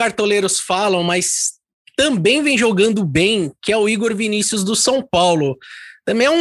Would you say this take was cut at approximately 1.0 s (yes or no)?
no